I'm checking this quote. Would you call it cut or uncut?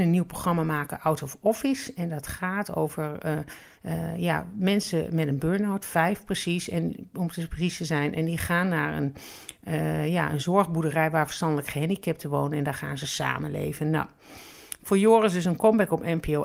uncut